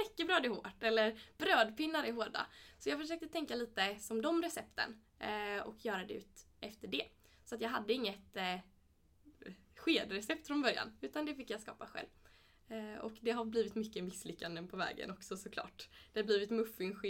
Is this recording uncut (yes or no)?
yes